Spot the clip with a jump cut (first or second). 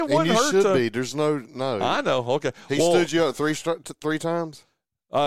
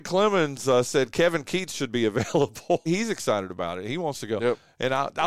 second